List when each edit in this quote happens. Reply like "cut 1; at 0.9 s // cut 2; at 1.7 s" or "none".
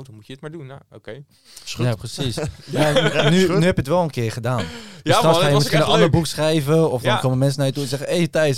none

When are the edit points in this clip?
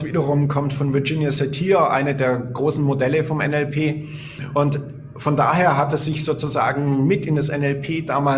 none

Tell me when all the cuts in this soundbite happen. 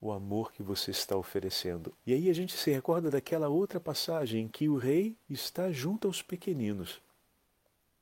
cut 1; at 2.0 s

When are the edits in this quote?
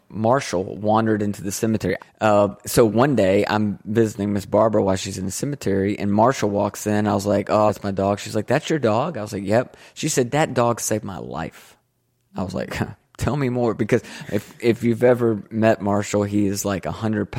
cut 1; at 2.0 s // cut 2; at 7.7 s

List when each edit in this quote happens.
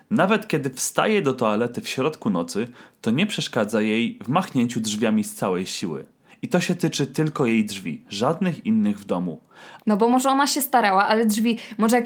cut 1; at 6.3 s // cut 2; at 9.8 s

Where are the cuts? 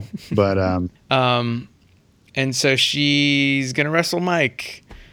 cut 1; at 1.0 s

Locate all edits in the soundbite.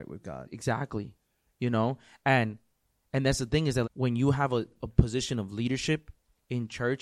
cut 1; at 3.8 s

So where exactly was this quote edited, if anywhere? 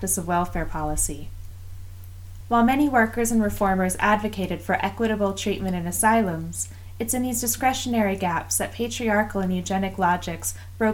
cut 1; at 2.4 s

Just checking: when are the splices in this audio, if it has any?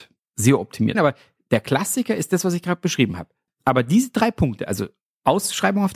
cut 1; at 0.9 s // cut 2; at 3.5 s

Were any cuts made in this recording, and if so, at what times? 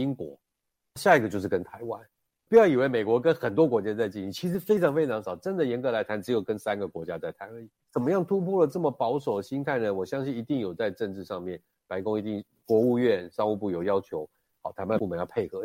cut 1; at 7.8 s

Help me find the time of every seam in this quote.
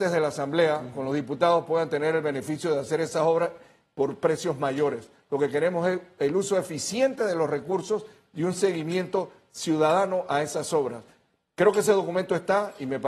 none

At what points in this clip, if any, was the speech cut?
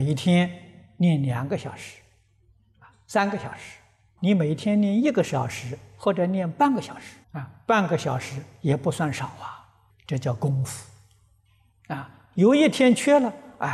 cut 1; at 4.2 s // cut 2; at 7.2 s // cut 3; at 9.9 s

